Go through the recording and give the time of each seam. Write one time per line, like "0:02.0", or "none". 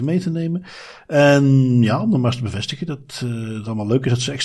none